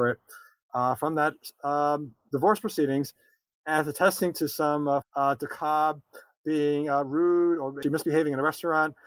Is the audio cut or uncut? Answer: cut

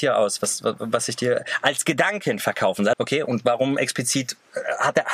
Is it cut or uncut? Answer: cut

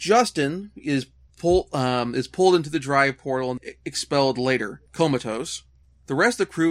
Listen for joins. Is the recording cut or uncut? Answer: cut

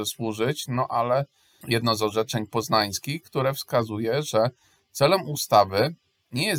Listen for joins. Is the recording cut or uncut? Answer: cut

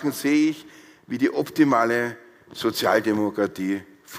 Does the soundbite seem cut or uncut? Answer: uncut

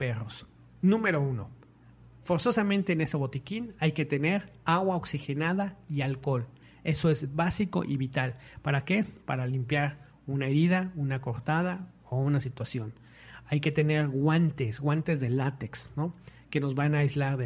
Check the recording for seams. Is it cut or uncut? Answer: uncut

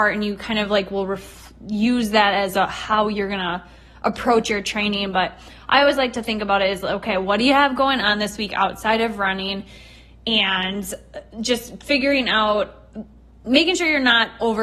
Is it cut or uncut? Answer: uncut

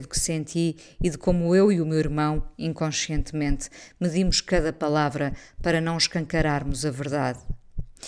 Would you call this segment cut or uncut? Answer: uncut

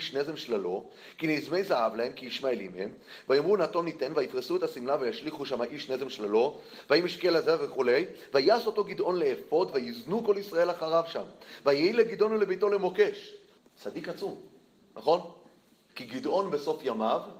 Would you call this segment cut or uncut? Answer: cut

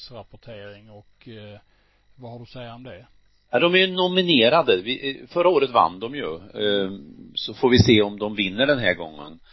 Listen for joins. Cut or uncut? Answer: uncut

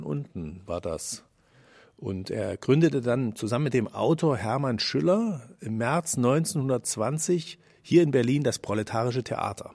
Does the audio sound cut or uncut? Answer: uncut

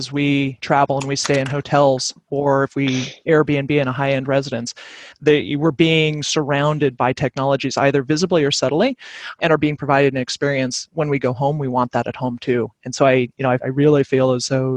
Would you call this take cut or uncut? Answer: cut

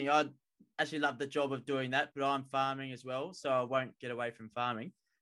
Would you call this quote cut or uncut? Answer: uncut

